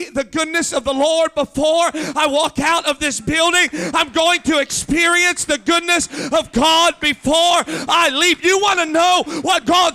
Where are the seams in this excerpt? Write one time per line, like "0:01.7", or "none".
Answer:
none